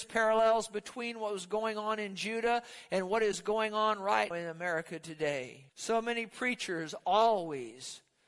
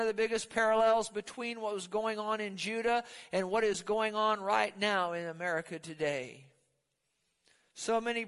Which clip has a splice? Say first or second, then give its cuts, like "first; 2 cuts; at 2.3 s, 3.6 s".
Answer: first; 2 cuts; at 4.3 s, 5.7 s